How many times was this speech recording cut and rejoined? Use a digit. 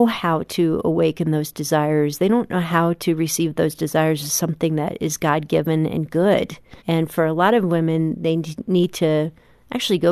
1